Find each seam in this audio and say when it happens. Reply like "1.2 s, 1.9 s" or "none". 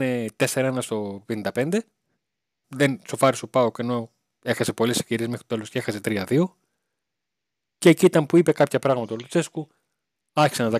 2.6 s